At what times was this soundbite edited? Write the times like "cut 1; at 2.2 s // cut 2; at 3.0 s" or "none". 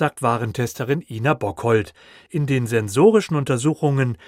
none